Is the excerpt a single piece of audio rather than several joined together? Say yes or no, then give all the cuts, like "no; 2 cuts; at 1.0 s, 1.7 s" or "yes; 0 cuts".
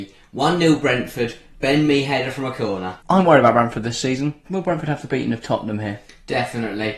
no; 2 cuts; at 3.0 s, 4.4 s